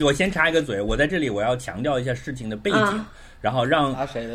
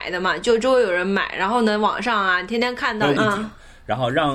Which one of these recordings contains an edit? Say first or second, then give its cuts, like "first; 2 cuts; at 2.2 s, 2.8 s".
second; 1 cut; at 3.2 s